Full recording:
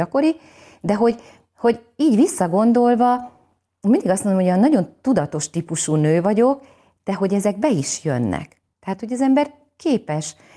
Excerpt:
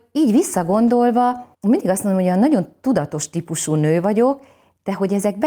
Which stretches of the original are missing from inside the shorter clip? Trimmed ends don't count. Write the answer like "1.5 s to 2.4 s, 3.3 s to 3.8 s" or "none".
3.4 s to 3.7 s